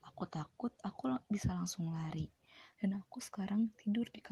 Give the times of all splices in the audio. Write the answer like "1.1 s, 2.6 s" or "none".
2.7 s